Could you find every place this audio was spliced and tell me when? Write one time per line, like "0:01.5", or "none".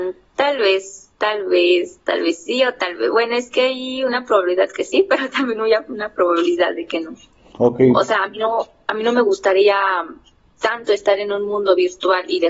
none